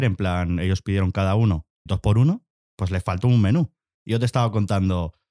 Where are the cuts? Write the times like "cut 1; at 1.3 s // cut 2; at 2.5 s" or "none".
cut 1; at 1.9 s